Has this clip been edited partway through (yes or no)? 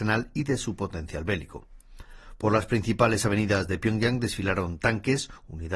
no